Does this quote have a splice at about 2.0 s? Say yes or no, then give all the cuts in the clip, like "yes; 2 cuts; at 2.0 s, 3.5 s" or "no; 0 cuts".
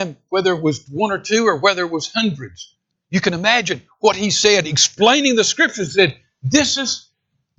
no; 0 cuts